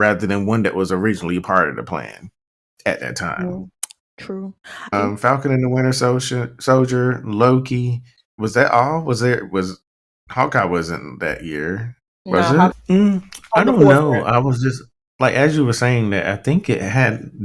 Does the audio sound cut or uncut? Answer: cut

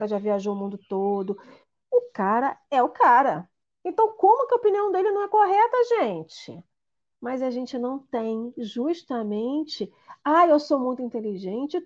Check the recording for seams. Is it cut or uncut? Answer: uncut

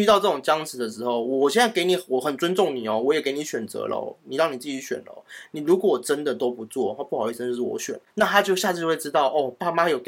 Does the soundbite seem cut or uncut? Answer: uncut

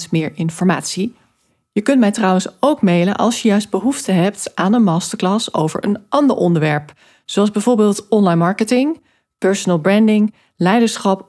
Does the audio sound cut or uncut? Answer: uncut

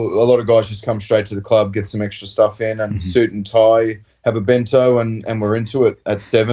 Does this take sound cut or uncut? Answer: uncut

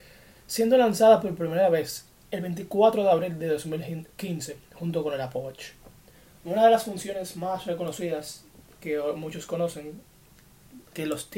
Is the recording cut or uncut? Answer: uncut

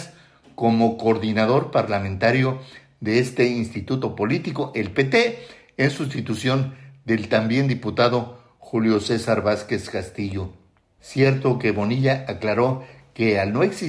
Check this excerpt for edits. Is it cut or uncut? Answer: cut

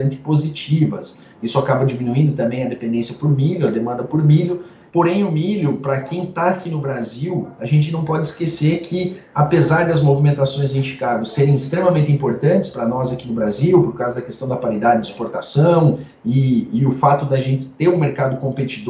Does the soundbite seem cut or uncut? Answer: cut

